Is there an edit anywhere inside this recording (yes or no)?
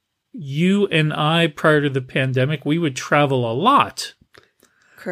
no